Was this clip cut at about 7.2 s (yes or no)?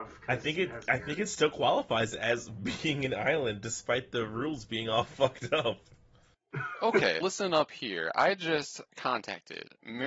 yes